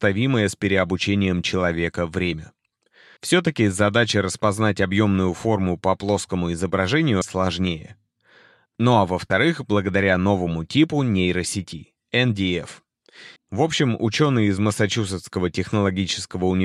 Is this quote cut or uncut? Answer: cut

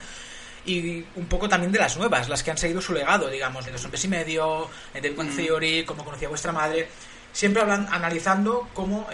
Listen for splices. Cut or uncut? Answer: cut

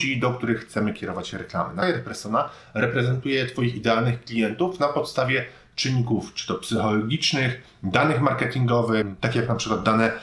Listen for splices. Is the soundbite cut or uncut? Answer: uncut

